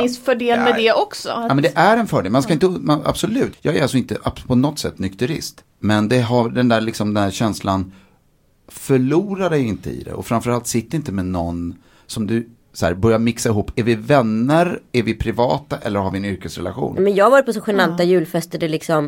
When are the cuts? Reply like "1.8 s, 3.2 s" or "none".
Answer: 3.5 s, 5.6 s